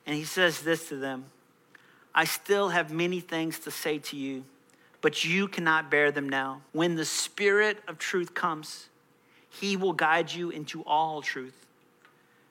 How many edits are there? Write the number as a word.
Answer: one